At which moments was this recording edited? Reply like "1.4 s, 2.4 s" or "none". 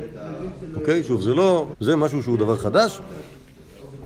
1.7 s